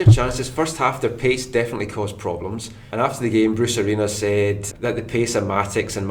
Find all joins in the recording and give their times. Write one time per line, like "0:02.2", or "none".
0:04.7